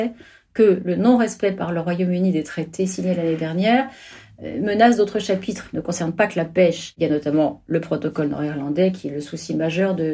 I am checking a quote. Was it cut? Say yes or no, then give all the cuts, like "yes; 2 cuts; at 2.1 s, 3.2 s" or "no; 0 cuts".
no; 0 cuts